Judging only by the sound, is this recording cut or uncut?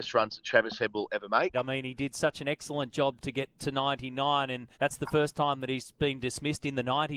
cut